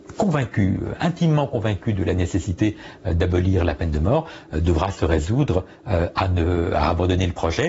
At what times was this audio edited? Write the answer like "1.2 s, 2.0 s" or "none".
none